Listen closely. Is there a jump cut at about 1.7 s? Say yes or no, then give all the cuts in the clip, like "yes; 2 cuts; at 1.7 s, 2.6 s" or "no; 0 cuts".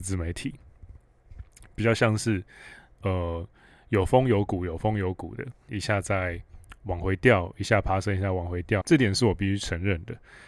no; 2 cuts; at 5.7 s, 8.8 s